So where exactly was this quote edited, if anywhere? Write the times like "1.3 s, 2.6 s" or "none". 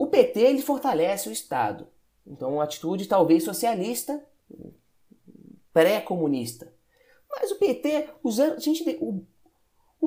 none